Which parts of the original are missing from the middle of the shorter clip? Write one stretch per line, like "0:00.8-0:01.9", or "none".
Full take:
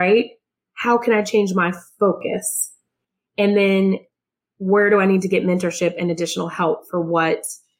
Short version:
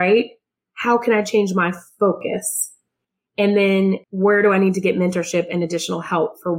0:04.0-0:04.5